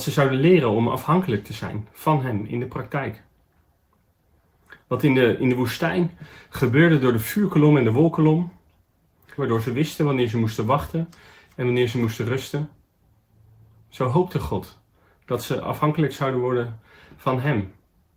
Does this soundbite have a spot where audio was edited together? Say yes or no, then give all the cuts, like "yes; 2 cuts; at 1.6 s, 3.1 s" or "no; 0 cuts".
yes; 1 cut; at 9.4 s